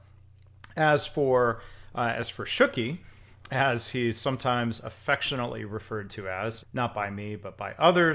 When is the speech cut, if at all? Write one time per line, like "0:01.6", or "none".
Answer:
0:06.6